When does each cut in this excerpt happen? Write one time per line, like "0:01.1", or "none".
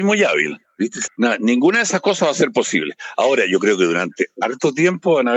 0:01.0